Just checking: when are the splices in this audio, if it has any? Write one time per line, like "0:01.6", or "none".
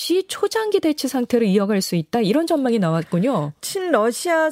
none